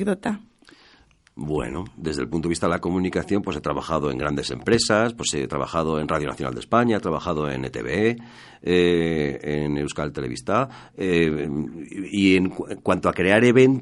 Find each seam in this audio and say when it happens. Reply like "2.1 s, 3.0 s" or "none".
none

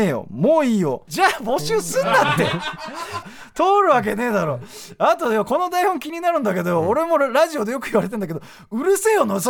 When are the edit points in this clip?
1.1 s, 3.2 s

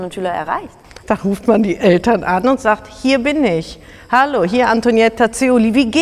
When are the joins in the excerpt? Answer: 1.0 s

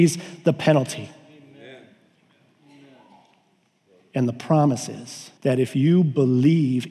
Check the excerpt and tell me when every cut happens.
5.4 s

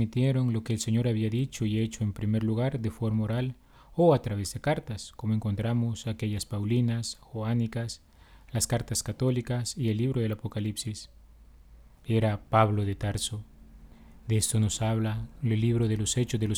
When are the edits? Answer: 12.0 s

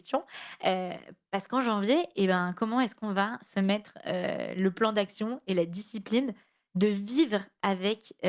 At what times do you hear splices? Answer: none

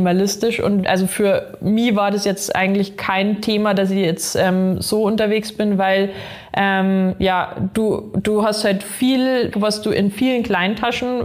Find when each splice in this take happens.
9.5 s

